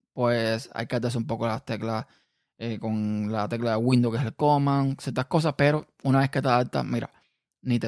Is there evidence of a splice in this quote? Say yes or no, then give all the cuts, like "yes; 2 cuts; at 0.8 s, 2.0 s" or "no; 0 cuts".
no; 0 cuts